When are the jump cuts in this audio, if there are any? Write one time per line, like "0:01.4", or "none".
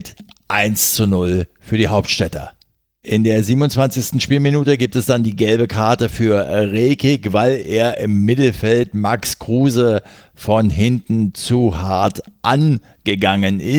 none